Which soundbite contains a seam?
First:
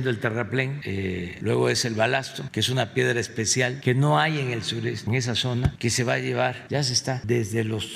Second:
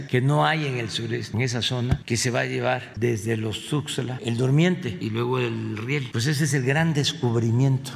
second; 3 cuts; at 2.9 s, 4.2 s, 6.1 s

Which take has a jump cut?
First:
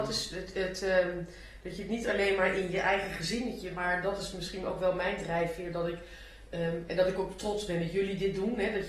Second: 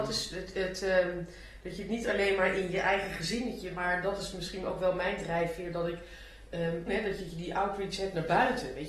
second; 1 cut; at 6.9 s

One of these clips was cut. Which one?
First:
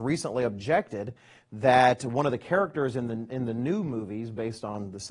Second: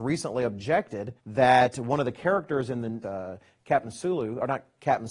second; 2 cuts; at 1.2 s, 3.0 s

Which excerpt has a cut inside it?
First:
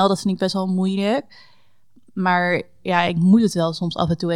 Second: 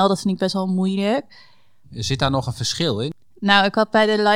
second; 1 cut; at 1.8 s

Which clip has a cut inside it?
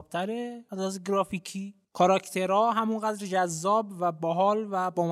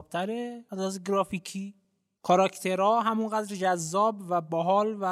first; 1 cut; at 1.8 s

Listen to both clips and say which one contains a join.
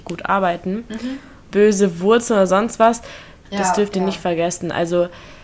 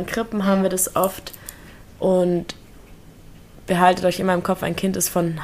first; 2 cuts; at 1.5 s, 3.5 s

